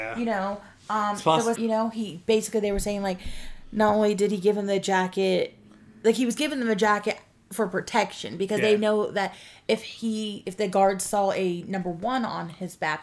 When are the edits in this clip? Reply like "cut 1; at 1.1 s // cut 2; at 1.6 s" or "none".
cut 1; at 1.5 s